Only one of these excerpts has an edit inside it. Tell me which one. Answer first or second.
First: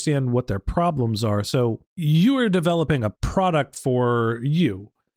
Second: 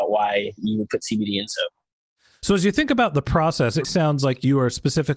second